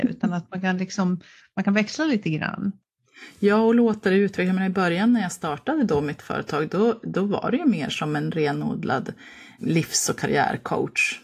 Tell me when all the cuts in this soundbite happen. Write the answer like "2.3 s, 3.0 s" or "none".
9.6 s